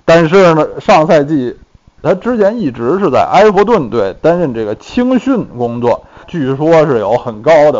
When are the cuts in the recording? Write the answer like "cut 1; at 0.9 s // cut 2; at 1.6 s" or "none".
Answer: cut 1; at 2.0 s // cut 2; at 6.2 s